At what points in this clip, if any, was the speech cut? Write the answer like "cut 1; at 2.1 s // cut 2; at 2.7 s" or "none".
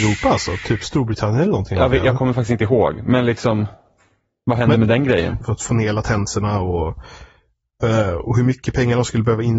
cut 1; at 5.4 s